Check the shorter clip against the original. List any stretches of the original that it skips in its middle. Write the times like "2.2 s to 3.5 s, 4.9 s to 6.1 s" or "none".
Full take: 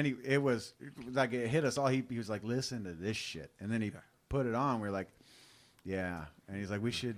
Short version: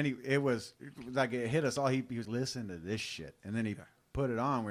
2.2 s to 2.4 s